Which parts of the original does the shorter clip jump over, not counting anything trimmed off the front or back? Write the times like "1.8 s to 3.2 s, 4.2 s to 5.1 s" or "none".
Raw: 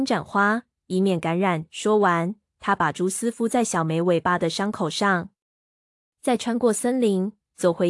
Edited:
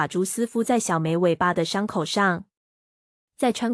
none